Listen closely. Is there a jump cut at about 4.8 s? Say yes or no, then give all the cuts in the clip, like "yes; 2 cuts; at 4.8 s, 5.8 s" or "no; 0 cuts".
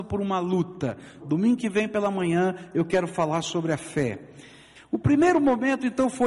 yes; 2 cuts; at 1.2 s, 4.8 s